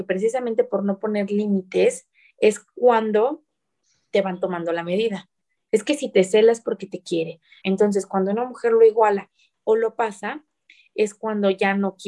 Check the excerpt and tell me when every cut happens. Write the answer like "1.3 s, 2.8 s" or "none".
5.7 s, 7.6 s